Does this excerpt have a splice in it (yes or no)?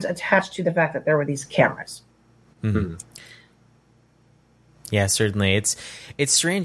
no